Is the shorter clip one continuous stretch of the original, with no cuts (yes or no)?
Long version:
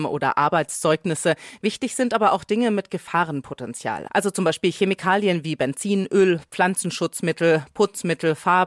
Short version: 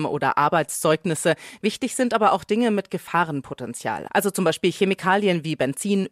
yes